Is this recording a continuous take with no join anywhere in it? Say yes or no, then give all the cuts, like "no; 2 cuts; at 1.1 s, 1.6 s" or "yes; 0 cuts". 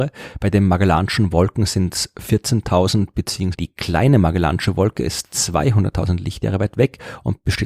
no; 1 cut; at 3.5 s